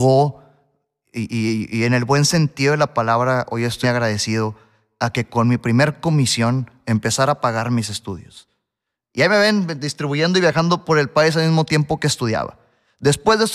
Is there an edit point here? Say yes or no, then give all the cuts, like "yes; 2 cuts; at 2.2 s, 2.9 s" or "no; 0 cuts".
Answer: yes; 2 cuts; at 3.8 s, 9.0 s